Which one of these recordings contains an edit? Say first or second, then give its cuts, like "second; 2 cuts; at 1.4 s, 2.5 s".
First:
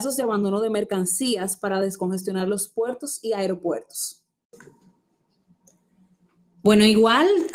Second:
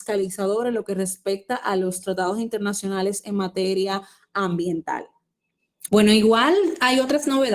second; 1 cut; at 5.9 s